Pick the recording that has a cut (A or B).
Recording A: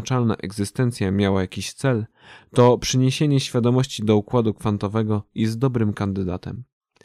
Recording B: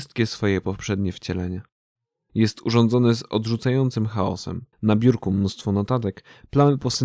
B